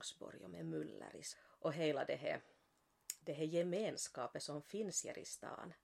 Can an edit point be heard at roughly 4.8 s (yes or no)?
no